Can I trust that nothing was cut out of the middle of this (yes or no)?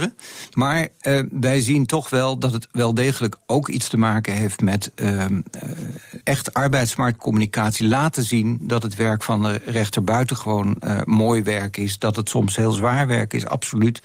no